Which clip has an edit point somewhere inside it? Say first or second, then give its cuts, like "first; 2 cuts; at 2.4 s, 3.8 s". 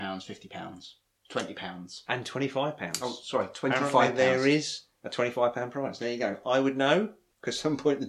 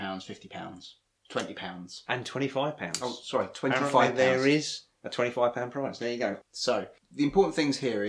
second; 1 cut; at 6.4 s